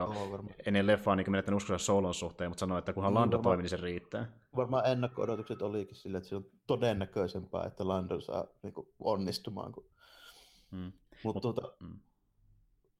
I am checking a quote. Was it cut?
no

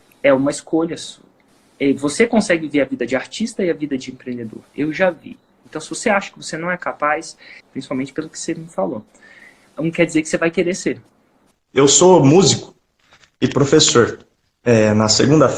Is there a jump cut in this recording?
yes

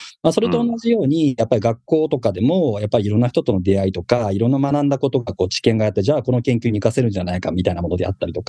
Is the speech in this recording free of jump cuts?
yes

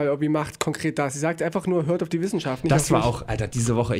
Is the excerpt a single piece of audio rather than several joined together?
yes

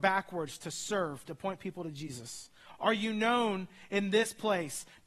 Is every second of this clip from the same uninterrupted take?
yes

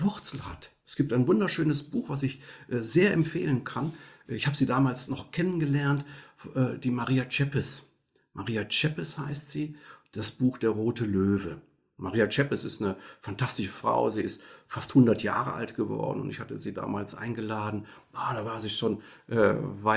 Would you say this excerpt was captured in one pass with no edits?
yes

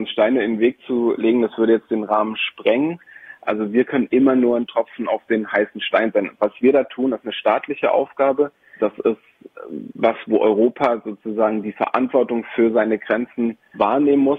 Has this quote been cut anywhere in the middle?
yes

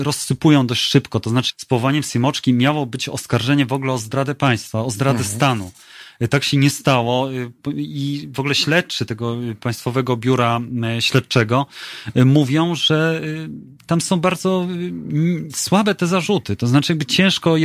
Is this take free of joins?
no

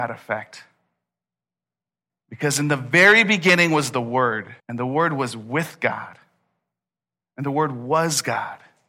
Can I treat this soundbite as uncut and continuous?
no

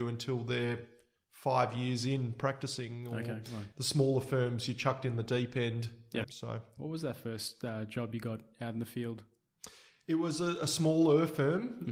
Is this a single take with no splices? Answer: no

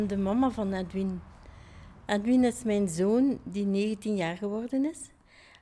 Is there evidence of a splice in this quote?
no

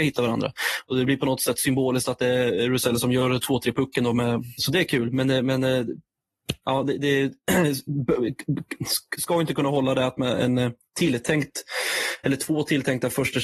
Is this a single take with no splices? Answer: no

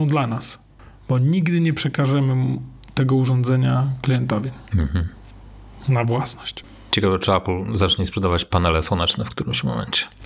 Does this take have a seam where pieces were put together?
no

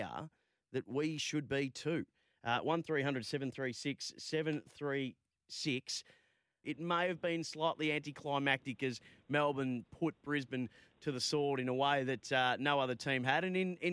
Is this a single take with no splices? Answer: no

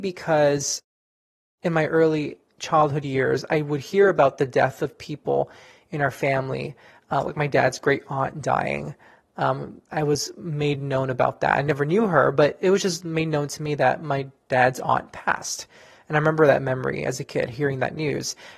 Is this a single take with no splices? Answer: yes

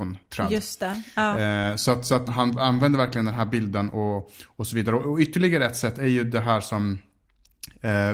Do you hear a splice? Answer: yes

